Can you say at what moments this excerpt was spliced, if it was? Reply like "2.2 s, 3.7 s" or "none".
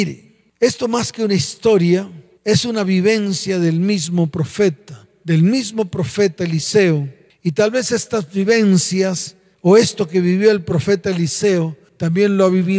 none